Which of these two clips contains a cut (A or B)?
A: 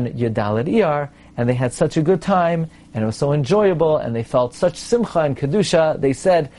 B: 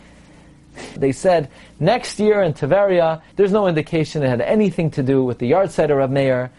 B